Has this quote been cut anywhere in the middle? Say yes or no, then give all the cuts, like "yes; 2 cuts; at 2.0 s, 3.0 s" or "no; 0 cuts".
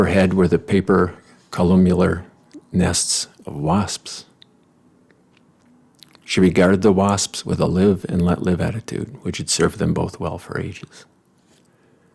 no; 0 cuts